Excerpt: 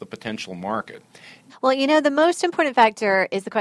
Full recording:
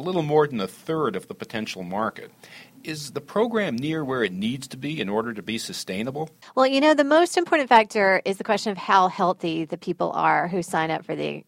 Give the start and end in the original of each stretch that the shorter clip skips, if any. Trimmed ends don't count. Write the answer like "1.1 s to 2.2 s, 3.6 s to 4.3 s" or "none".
2.8 s to 6.4 s